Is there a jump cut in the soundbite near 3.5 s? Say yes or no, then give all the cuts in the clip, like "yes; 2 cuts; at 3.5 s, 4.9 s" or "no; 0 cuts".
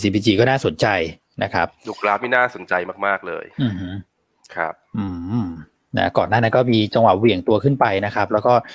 yes; 1 cut; at 3.5 s